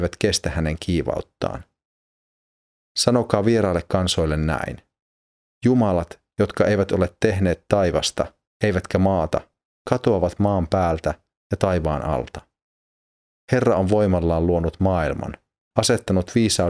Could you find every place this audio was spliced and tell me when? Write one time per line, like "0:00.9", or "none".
none

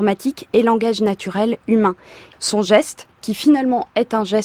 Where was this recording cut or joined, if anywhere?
0:02.3

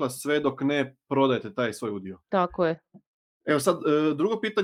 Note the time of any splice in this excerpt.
0:02.2

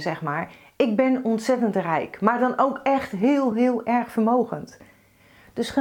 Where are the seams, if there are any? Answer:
0:03.5

